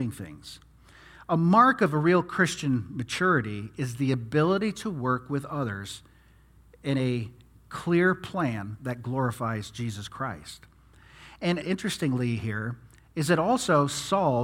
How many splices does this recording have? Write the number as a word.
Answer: one